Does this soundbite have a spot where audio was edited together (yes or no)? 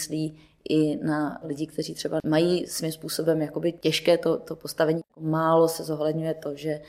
no